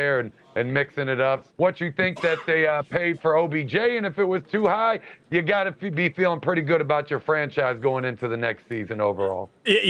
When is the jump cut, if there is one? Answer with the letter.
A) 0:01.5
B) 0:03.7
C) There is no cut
A